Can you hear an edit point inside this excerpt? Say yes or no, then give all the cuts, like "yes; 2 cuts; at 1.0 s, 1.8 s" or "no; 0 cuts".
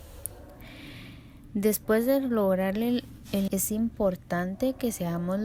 yes; 1 cut; at 3.5 s